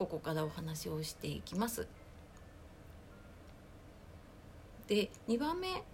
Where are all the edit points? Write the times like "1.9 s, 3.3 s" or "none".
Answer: 4.8 s